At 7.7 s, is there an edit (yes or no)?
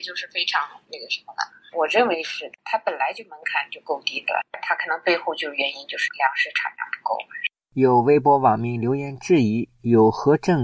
no